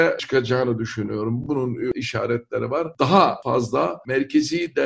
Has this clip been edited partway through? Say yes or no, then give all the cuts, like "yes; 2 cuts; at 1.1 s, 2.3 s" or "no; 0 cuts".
no; 0 cuts